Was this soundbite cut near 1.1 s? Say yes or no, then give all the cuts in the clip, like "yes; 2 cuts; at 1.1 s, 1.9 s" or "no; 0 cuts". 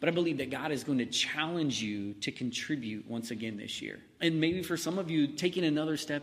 no; 1 cut; at 4.2 s